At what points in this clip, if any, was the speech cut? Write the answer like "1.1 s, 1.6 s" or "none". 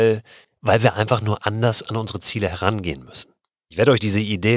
none